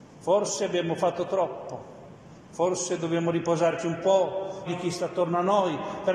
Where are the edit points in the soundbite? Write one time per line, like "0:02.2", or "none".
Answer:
0:04.7